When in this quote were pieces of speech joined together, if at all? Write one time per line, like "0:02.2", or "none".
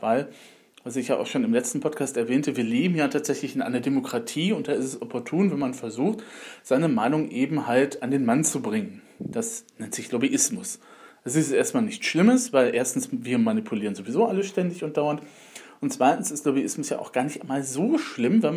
none